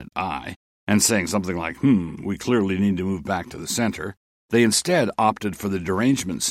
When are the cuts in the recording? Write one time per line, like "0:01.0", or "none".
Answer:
none